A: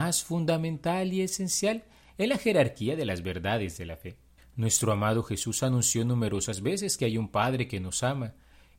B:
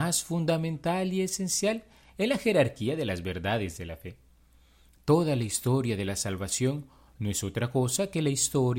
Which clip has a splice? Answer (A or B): A